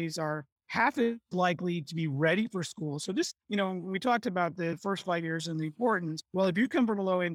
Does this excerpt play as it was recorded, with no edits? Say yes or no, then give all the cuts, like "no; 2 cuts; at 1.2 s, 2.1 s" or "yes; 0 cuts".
yes; 0 cuts